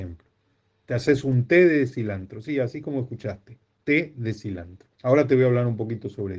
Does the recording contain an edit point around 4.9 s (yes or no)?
yes